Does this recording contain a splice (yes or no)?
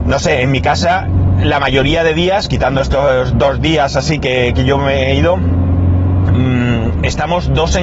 no